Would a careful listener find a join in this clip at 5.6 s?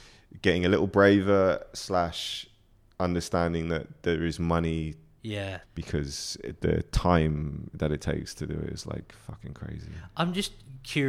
yes; 1 cut; at 5.6 s

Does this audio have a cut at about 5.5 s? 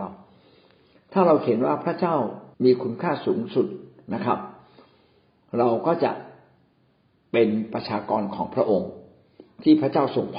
no; 1 cut; at 2.5 s

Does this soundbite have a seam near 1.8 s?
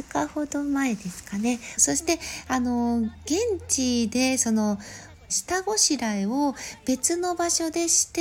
yes; 2 cuts; at 1.8 s, 5.3 s

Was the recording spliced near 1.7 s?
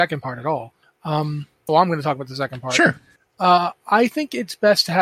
yes; 1 cut; at 1.7 s

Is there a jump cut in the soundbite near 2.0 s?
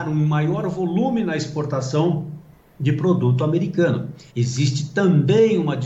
no; 1 cut; at 4.3 s

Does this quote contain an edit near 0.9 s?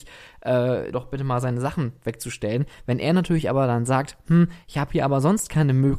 yes; 1 cut; at 0.9 s

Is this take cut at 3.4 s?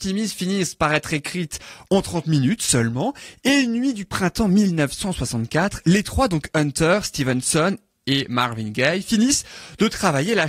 no; 0 cuts

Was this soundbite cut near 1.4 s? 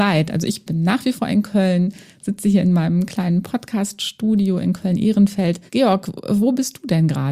no; 1 cut; at 5.7 s

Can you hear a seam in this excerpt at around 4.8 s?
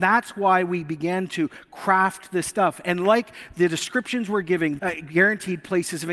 yes; 1 cut; at 4.8 s

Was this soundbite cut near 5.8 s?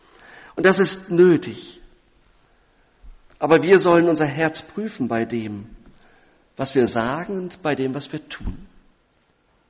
no; 0 cuts

